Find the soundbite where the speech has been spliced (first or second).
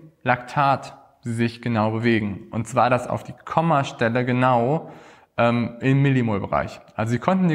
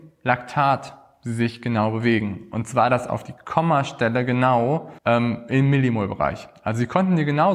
second